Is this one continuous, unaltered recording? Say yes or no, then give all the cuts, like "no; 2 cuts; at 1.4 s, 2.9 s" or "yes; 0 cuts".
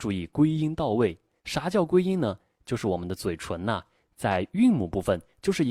yes; 0 cuts